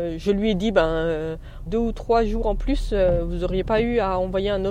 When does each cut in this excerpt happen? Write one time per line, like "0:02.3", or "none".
0:01.7